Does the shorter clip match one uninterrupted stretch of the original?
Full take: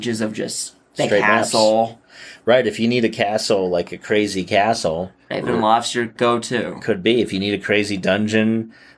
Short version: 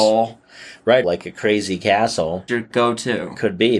no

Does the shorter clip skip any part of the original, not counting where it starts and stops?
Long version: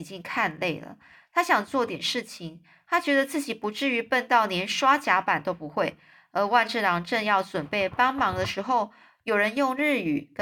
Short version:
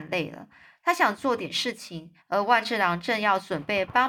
yes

